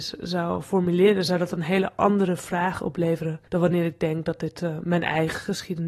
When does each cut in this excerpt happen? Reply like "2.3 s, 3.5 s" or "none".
3.5 s